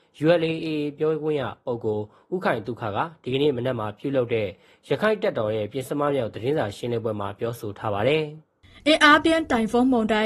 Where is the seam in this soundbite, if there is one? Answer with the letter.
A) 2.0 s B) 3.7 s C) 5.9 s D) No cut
D